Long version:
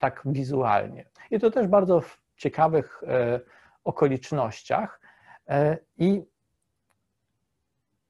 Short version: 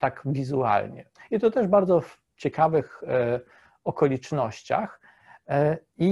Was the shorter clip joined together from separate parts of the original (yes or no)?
no